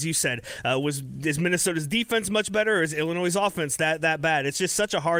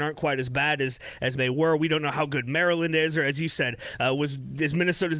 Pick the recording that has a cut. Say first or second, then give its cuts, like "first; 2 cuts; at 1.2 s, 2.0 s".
second; 1 cut; at 1.4 s